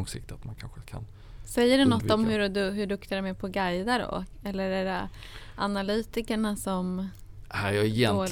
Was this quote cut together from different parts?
no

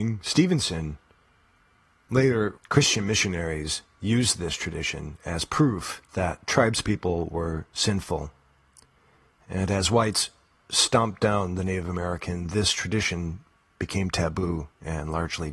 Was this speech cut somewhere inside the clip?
yes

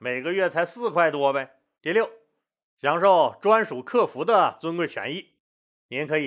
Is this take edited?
yes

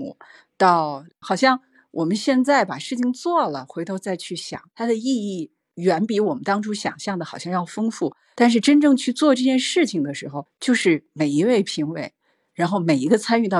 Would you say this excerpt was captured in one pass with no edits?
no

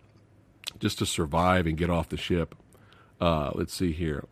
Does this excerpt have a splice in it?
no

